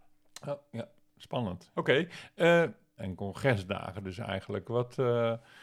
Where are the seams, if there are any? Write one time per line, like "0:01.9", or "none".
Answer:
0:01.7
0:03.0